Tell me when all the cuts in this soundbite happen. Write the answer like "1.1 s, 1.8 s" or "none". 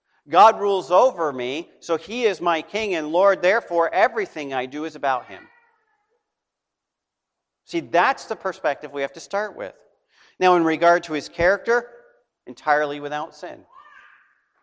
12.3 s